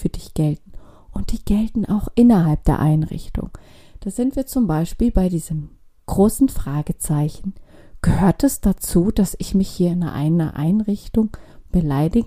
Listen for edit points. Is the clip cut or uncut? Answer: uncut